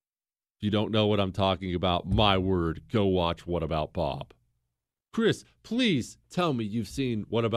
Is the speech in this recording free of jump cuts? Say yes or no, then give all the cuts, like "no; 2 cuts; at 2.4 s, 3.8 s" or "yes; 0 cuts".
yes; 0 cuts